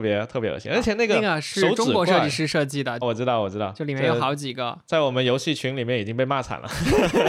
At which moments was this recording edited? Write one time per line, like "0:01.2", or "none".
0:03.0